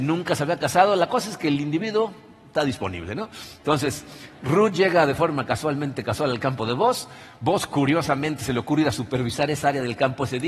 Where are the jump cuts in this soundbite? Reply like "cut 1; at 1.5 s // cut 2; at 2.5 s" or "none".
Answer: none